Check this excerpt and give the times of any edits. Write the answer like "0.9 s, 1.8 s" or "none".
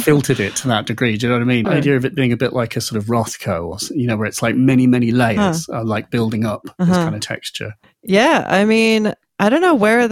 1.6 s